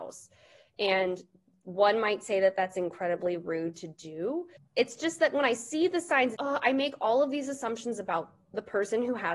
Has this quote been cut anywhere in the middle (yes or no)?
yes